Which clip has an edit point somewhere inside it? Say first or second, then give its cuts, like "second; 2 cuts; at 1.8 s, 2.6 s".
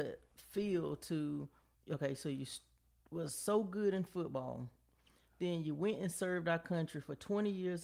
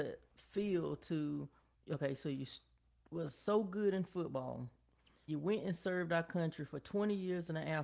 second; 1 cut; at 5.3 s